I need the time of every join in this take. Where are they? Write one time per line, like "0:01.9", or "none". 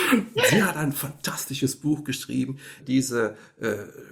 0:02.8